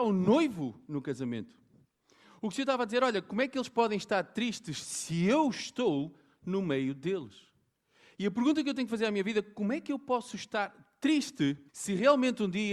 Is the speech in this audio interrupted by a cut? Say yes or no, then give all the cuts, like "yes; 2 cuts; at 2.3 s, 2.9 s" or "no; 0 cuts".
yes; 1 cut; at 11.7 s